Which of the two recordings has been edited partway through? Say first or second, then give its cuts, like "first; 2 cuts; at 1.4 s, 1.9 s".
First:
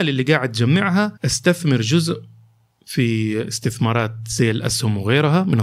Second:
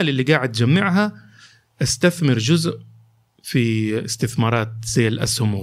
first; 1 cut; at 1.2 s